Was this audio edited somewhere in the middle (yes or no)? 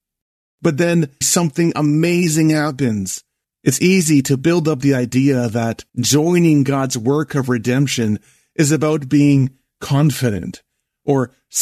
yes